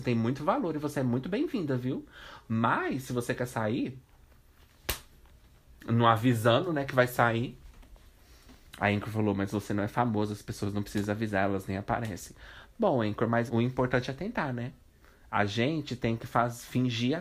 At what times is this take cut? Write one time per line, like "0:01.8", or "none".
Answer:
0:13.5